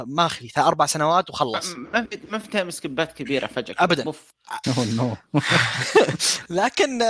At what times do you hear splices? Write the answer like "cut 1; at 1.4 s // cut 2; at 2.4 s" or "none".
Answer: cut 1; at 4.6 s